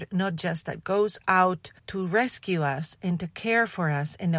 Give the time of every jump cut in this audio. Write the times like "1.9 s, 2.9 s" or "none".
1.8 s